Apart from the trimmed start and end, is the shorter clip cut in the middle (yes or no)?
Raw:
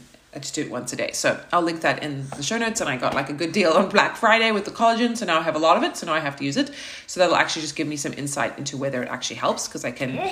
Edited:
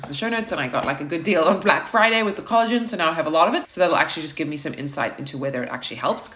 yes